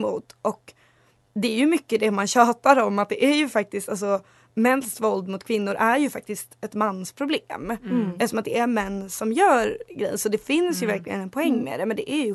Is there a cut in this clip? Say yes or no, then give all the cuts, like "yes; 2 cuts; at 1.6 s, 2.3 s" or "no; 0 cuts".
no; 0 cuts